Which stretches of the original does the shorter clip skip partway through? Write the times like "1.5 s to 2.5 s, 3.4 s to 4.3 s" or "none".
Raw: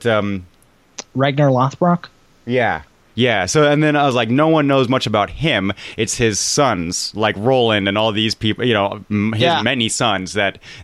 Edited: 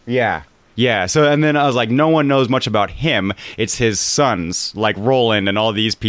none

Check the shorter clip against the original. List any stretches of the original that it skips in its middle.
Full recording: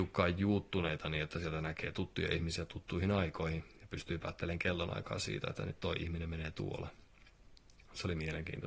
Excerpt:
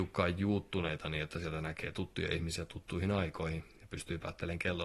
none

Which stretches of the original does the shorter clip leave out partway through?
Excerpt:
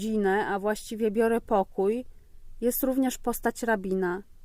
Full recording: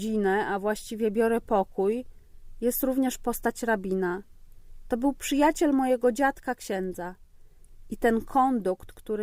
none

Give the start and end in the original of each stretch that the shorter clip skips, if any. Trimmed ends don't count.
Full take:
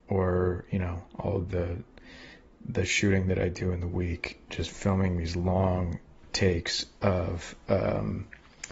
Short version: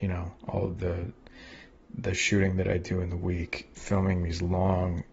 4.5 s to 4.7 s

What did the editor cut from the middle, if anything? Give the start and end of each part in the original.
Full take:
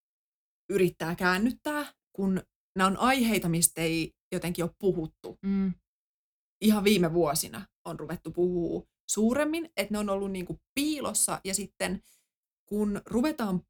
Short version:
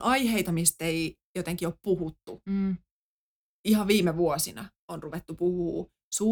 none

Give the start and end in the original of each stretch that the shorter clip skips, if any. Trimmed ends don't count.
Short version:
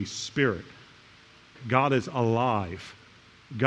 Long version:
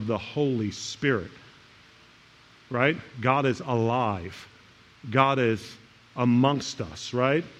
2.2 s to 3.1 s

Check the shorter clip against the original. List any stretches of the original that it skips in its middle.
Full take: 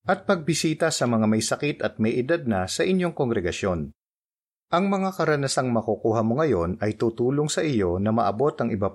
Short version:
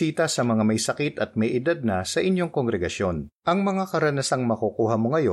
4.0 s to 4.6 s

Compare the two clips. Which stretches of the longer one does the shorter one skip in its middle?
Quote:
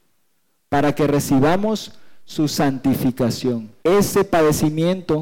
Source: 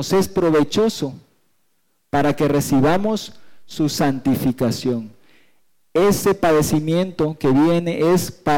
5.2 s to 5.9 s

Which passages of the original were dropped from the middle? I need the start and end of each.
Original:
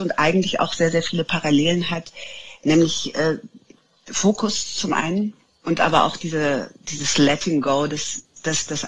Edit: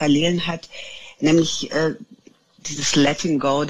4.0 s to 6.8 s

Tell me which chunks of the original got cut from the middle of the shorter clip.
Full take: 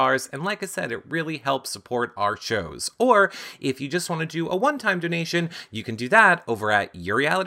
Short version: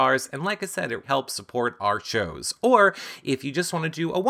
1.0 s to 1.4 s

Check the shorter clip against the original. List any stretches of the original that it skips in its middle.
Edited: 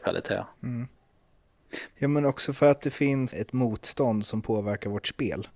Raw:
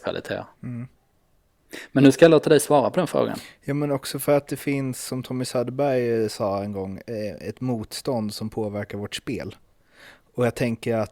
1.9 s to 3.6 s, 5.0 s to 7.4 s

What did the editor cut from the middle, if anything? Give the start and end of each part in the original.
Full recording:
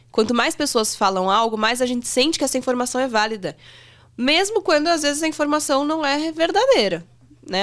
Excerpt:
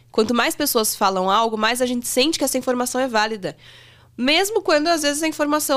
none

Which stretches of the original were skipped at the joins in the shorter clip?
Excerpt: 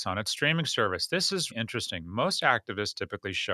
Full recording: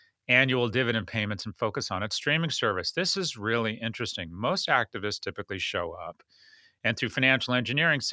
3.3 s to 3.8 s

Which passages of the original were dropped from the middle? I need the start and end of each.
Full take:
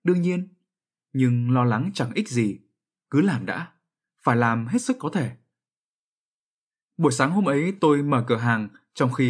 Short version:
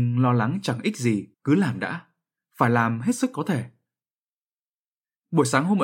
2.6 s to 3.0 s

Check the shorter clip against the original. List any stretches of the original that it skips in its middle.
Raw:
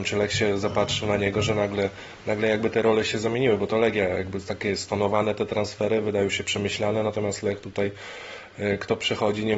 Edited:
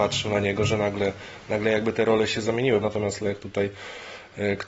3.6 s to 7.0 s

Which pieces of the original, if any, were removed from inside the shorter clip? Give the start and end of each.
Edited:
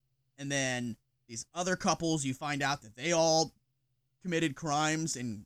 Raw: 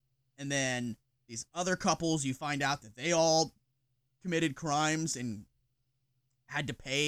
none

